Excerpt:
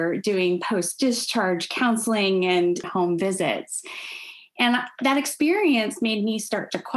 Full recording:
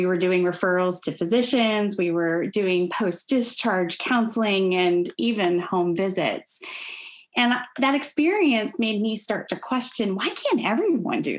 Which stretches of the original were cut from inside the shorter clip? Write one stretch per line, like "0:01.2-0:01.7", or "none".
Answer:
0:05.1-0:05.6